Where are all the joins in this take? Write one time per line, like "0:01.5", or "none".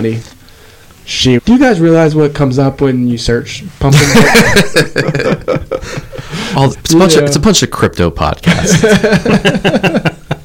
0:01.4
0:06.7